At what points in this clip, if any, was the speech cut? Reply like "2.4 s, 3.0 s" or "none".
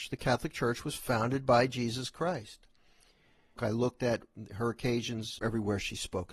3.6 s, 5.4 s